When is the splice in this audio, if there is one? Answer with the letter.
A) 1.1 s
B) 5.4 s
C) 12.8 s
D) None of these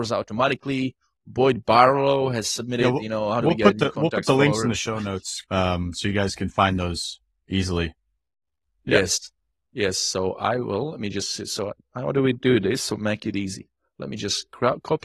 B